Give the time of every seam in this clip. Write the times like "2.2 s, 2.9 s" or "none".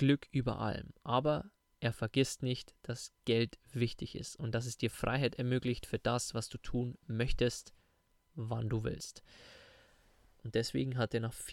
10.4 s